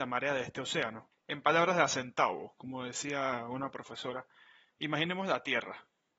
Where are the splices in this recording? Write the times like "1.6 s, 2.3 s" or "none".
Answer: 1.2 s